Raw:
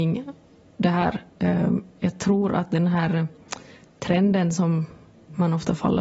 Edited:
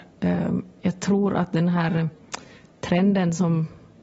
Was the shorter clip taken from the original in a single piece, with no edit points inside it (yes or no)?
yes